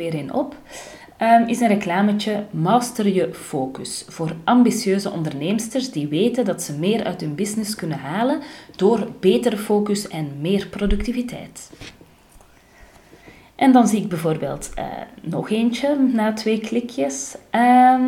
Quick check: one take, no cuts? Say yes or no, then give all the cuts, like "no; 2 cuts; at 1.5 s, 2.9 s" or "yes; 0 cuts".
yes; 0 cuts